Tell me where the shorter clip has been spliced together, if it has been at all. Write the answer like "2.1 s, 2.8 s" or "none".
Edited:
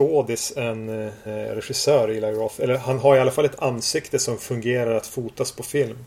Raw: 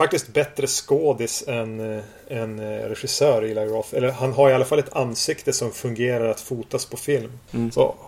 1.3 s

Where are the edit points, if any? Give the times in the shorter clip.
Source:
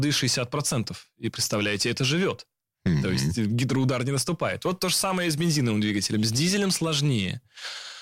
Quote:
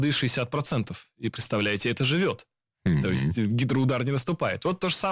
none

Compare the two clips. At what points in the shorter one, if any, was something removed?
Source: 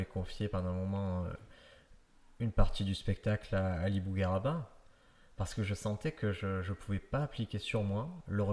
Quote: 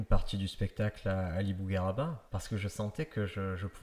2.3 s

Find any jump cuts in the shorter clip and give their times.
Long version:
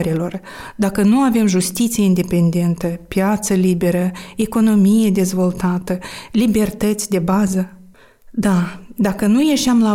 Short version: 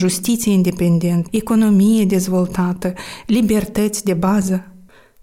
1.3 s

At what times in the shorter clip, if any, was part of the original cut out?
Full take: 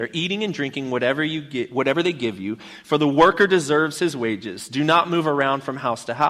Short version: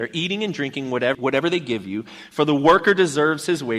1.1 s

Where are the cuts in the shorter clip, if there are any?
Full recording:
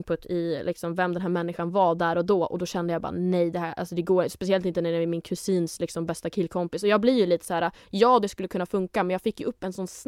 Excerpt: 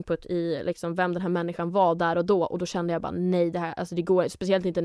none

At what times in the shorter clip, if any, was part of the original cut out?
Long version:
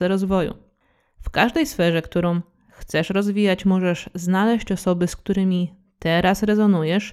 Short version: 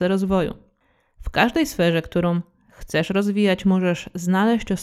none

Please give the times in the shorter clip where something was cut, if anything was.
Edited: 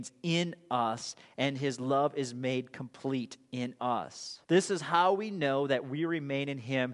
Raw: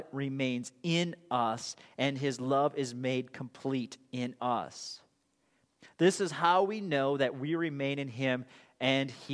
4.4 s

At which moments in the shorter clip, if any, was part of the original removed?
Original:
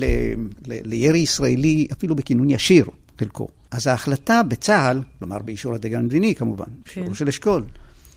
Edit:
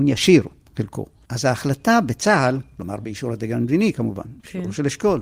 none

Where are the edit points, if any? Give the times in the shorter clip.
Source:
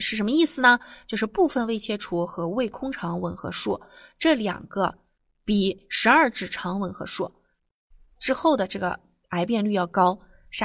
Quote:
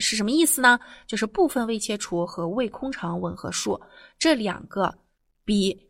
none

